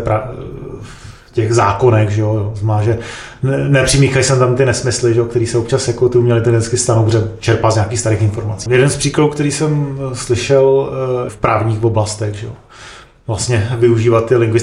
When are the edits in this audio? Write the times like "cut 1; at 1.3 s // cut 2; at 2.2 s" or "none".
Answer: cut 1; at 8.7 s // cut 2; at 11.3 s

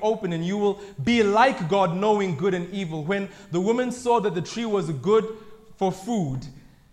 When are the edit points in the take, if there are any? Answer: none

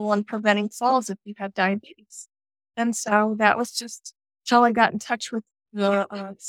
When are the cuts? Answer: none

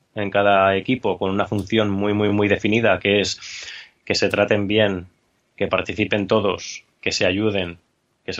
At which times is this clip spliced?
none

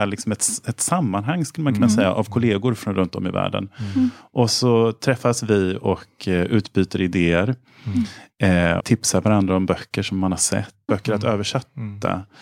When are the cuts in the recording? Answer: cut 1; at 8.8 s // cut 2; at 10.9 s

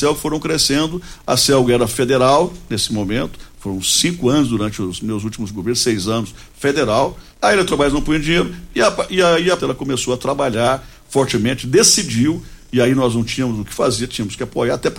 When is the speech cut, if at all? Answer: cut 1; at 7.3 s // cut 2; at 9.6 s

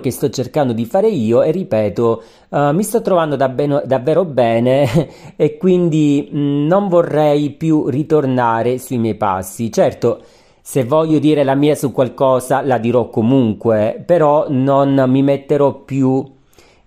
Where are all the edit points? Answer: none

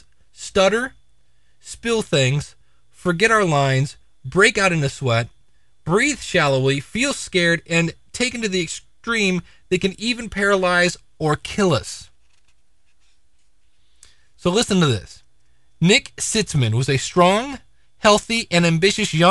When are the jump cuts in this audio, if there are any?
none

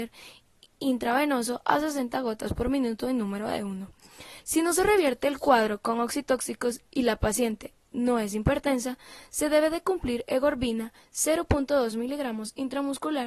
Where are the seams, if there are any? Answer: cut 1; at 4.4 s

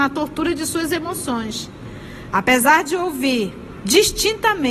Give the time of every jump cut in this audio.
cut 1; at 2.3 s

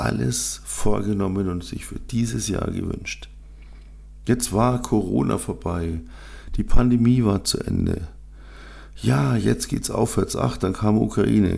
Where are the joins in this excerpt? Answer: none

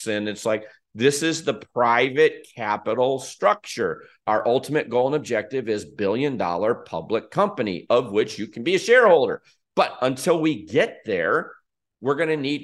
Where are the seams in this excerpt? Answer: cut 1; at 7.9 s

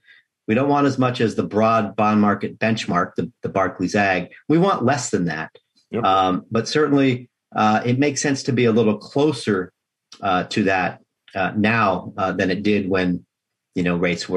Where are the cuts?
none

